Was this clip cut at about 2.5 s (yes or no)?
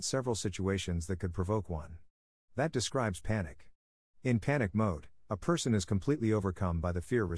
yes